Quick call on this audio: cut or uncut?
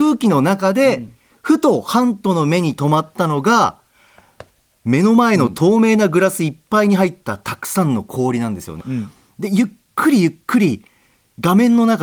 cut